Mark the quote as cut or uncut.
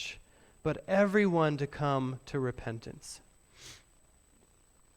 uncut